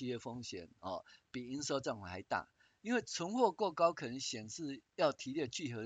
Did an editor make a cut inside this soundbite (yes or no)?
no